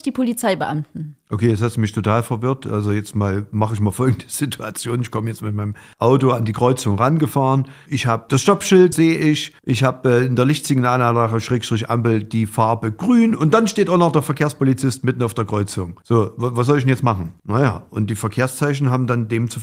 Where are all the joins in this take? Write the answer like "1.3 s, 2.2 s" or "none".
8.9 s, 17.4 s